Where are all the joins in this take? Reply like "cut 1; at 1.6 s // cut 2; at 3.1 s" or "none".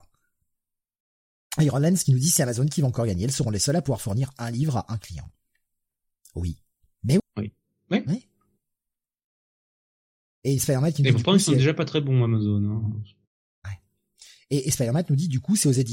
cut 1; at 7.2 s